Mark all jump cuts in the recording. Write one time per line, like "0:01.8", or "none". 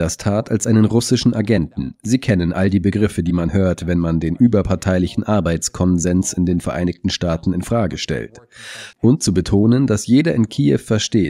0:08.9

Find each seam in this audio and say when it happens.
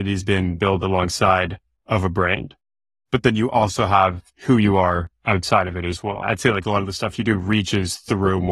0:04.3

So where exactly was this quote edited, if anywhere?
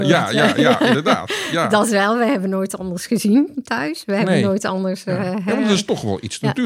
none

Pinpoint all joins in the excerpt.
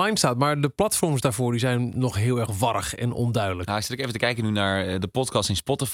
none

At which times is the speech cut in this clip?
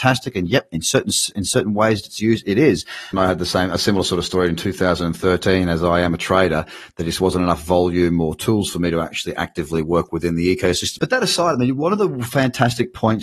0:03.1
0:11.0

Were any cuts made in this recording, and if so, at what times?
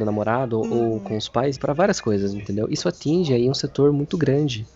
0:01.6

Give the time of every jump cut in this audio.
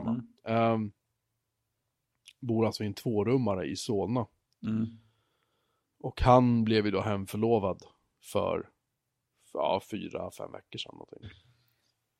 0:11.2

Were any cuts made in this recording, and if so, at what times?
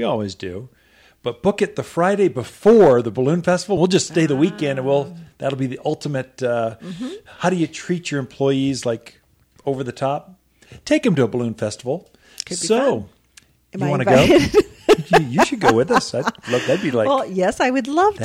none

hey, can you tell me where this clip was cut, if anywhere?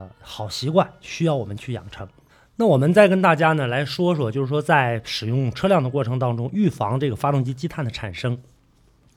none

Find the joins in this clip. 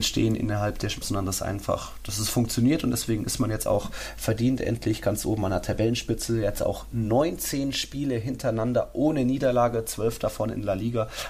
0:01.0

